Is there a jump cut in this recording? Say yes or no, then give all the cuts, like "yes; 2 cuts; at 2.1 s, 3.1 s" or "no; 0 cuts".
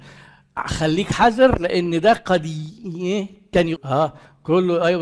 yes; 1 cut; at 3.8 s